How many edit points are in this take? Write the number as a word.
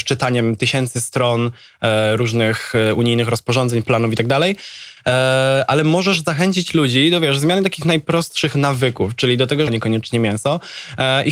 one